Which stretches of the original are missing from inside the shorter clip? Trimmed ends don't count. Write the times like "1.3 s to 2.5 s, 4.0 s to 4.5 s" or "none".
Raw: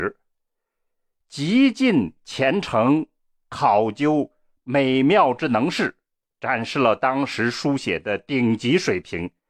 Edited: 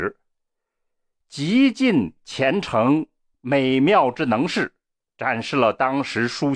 3.3 s to 4.6 s